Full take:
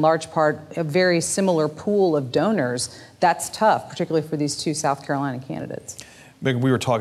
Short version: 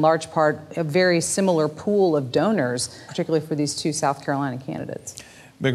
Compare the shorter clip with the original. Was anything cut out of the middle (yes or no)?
yes